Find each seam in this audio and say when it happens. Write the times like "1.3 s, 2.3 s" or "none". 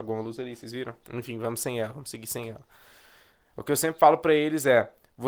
1.0 s